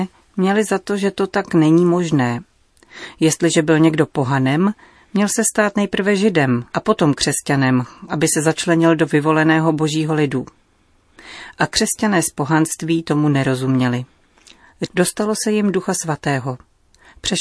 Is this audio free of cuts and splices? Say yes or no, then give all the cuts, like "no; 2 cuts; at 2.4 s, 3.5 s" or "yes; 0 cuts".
no; 2 cuts; at 6.7 s, 14.8 s